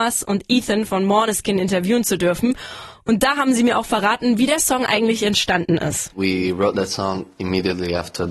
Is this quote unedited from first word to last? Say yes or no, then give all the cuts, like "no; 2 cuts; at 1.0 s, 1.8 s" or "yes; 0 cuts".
yes; 0 cuts